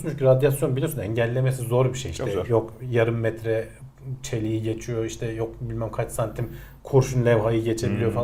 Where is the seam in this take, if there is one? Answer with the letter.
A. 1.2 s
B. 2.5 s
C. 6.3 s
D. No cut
D